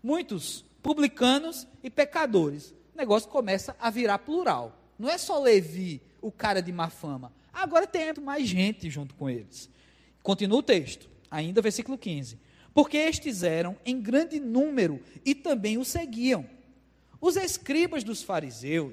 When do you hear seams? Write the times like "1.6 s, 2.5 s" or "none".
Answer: 8.1 s